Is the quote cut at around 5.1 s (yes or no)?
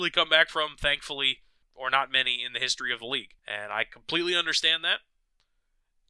no